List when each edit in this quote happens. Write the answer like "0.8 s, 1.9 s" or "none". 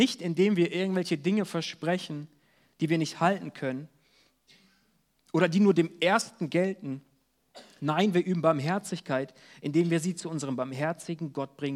none